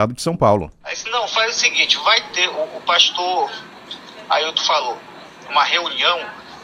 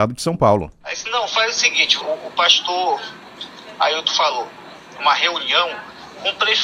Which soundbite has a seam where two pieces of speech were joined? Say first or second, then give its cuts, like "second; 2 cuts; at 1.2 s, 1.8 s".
second; 1 cut; at 2.0 s